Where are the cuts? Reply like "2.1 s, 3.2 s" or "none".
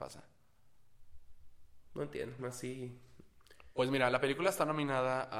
2.4 s

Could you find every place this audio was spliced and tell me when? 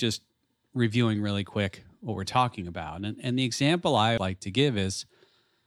4.2 s

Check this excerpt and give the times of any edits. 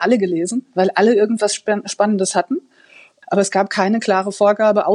3.2 s

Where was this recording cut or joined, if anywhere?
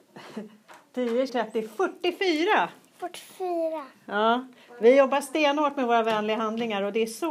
1.3 s, 3.9 s

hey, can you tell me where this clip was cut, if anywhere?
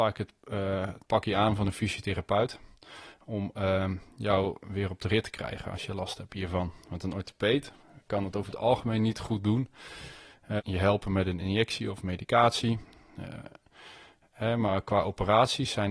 10.6 s

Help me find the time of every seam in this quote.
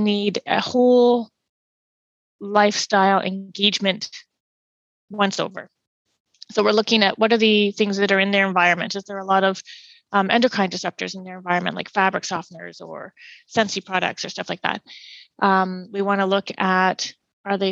none

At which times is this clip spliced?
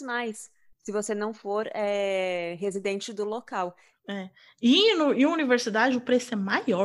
4.0 s

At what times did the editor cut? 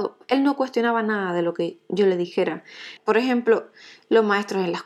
3.0 s

